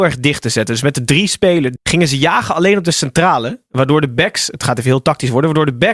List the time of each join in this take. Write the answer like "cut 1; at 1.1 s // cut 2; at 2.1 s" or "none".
cut 1; at 1.8 s